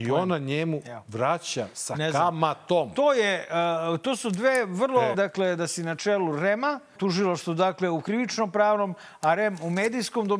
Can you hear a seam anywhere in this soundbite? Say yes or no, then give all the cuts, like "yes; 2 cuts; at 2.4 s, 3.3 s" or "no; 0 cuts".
yes; 2 cuts; at 5.1 s, 7.0 s